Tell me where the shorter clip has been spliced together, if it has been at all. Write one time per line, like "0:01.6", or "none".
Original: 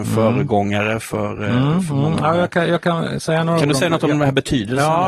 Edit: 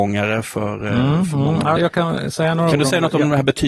0:01.8

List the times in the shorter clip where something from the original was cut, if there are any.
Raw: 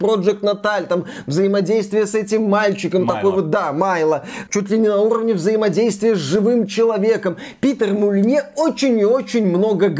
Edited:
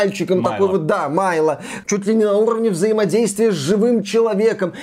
none

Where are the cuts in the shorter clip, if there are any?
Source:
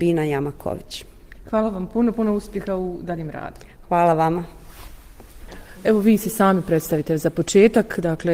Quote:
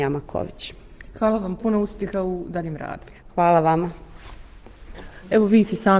0:01.6

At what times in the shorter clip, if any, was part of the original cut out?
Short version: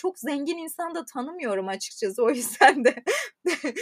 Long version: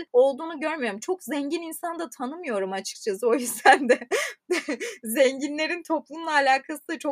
none

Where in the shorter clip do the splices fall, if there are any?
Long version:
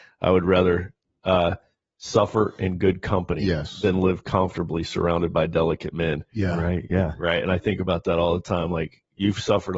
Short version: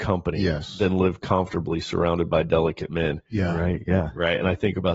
none

